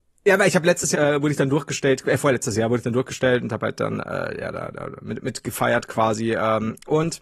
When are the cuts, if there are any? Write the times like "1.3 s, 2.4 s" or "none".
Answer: 0.9 s